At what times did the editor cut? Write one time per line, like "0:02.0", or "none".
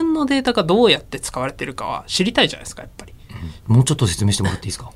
0:03.6